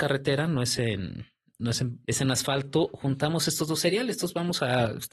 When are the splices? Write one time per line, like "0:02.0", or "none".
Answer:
0:02.0